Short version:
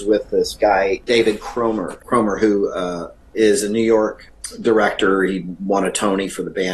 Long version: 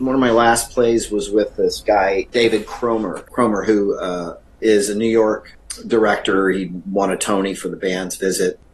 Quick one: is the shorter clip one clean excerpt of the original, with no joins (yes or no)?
yes